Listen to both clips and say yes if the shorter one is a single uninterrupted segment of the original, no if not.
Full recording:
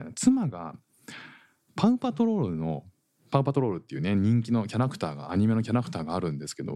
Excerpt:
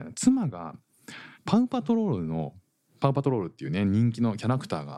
no